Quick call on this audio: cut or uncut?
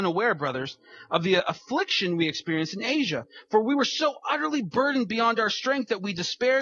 uncut